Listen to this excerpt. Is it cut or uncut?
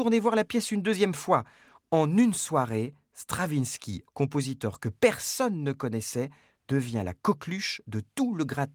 cut